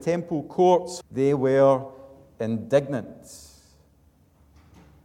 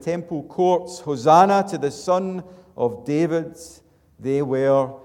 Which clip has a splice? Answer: first; 1 cut; at 1.0 s

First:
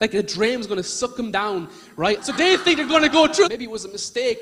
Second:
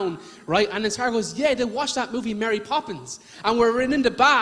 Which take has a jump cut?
first; 2 cuts; at 2.2 s, 3.4 s

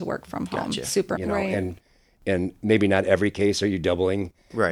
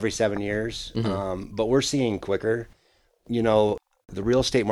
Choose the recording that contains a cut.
first; 1 cut; at 1.2 s

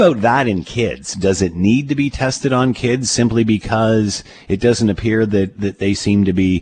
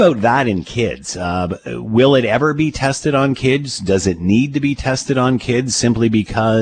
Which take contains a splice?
first; 1 cut; at 1.1 s

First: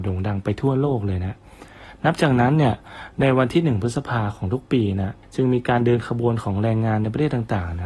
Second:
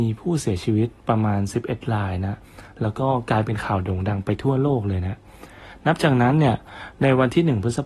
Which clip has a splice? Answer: first; 1 cut; at 5.2 s

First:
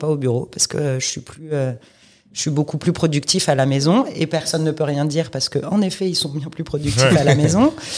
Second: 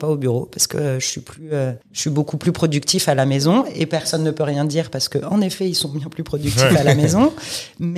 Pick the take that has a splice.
second; 1 cut; at 1.8 s

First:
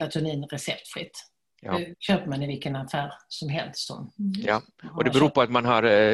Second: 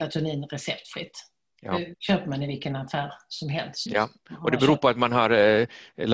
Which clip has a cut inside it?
second; 1 cut; at 3.9 s

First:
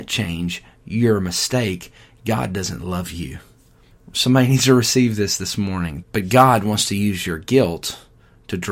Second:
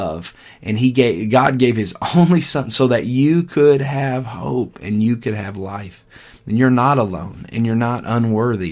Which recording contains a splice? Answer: first; 2 cuts; at 3.9 s, 6.0 s

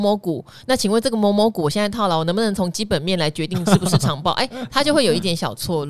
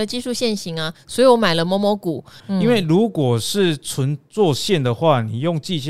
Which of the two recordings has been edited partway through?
second; 1 cut; at 2.4 s

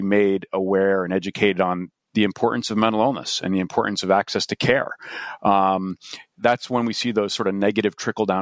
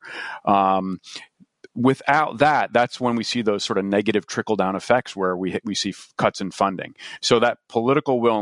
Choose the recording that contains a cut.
first; 1 cut; at 6.4 s

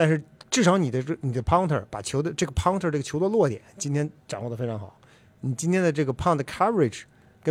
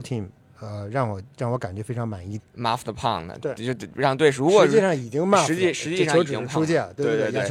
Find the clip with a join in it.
second; 1 cut; at 2.4 s

